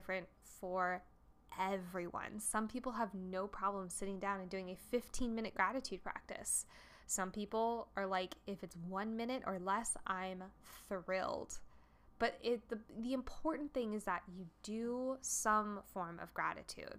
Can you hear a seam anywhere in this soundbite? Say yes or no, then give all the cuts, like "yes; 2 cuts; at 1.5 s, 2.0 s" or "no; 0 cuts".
no; 0 cuts